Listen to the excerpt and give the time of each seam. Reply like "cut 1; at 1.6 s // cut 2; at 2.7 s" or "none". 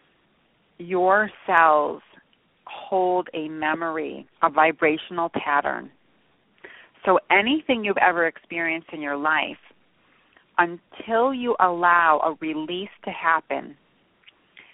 cut 1; at 4.3 s